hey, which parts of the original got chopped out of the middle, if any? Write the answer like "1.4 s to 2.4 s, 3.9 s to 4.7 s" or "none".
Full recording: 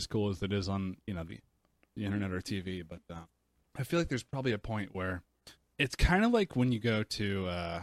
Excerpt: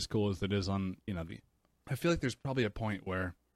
1.8 s to 3.7 s